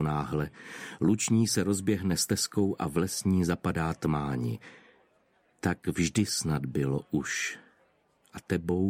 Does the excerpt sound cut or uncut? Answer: uncut